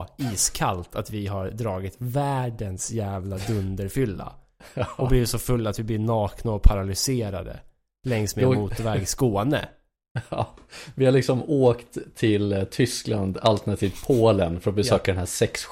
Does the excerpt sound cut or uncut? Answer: uncut